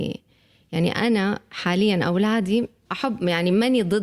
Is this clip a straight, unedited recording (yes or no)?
no